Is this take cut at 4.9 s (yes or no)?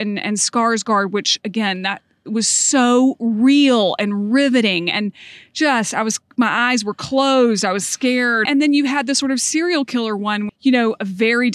no